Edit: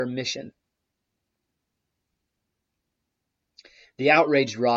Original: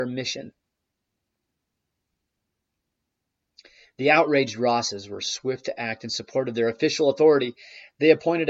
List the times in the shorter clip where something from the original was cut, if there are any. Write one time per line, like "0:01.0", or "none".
none